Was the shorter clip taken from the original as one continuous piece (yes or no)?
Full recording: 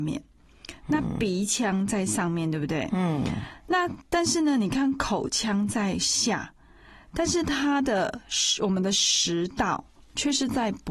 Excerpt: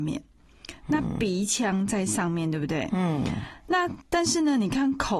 yes